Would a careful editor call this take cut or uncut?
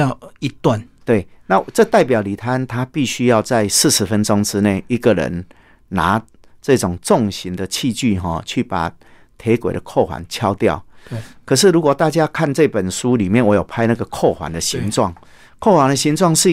uncut